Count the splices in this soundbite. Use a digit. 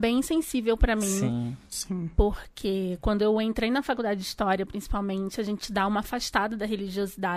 0